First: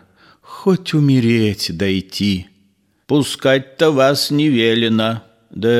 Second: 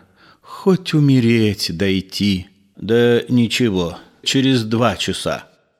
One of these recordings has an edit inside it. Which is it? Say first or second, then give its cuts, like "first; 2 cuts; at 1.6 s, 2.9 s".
second; 2 cuts; at 2.7 s, 4.2 s